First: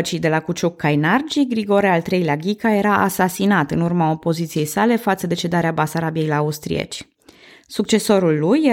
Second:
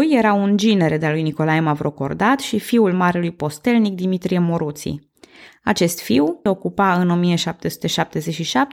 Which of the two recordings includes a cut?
second; 1 cut; at 6.5 s

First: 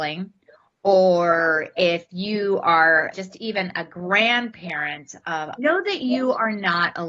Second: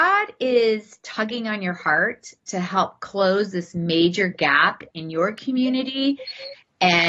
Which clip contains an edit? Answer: first; 2 cuts; at 3.1 s, 5.6 s

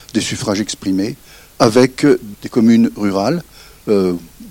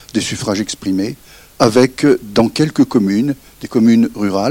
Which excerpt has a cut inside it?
first; 1 cut; at 2.3 s

